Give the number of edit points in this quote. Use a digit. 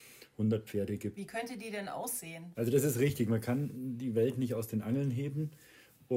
2